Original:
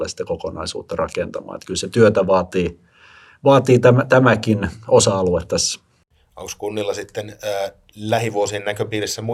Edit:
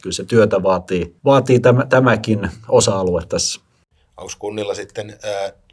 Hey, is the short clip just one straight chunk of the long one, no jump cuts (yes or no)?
no